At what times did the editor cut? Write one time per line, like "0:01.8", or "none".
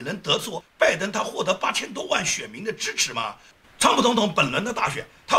0:03.6